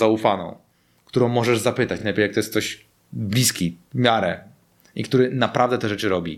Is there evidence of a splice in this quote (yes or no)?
no